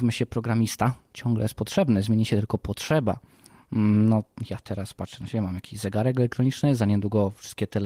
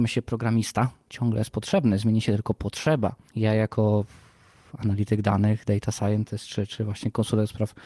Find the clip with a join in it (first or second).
second